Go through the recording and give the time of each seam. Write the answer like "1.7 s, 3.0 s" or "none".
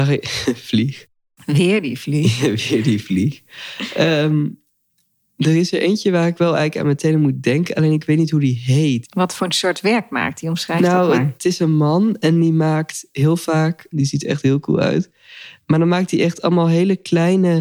9.0 s, 13.9 s